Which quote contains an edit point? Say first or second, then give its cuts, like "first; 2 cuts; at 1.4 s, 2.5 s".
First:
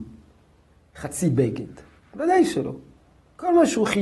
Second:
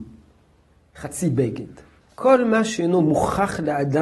second; 1 cut; at 2.0 s